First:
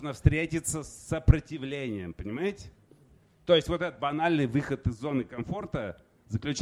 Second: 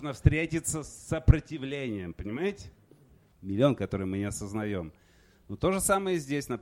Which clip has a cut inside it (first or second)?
second